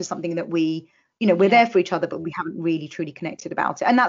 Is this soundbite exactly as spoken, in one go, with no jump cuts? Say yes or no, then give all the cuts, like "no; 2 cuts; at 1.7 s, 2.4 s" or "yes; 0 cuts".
yes; 0 cuts